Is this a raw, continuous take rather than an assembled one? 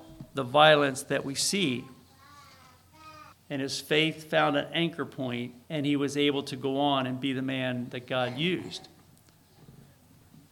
no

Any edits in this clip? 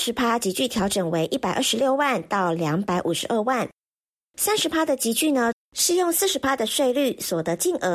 yes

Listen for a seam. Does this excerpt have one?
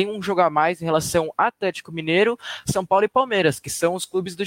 no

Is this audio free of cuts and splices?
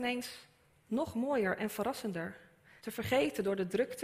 no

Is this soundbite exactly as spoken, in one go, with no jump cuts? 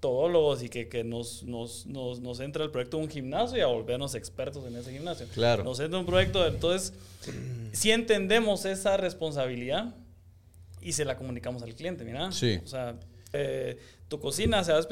no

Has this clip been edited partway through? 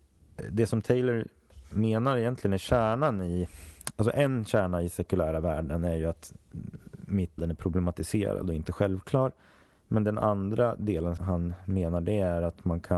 yes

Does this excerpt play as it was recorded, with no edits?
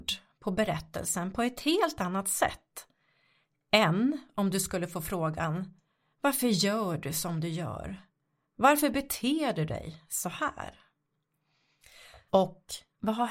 no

